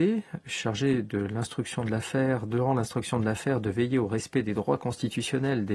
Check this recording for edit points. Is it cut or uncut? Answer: uncut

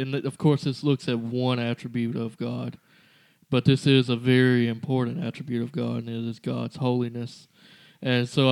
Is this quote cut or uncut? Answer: uncut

